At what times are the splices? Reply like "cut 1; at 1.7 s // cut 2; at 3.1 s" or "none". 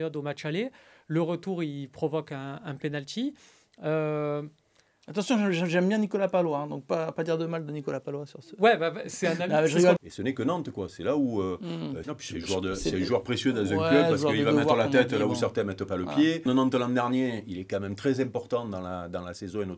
cut 1; at 10.0 s // cut 2; at 12.0 s // cut 3; at 16.5 s